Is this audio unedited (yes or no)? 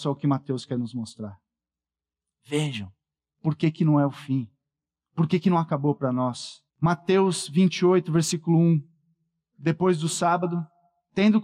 no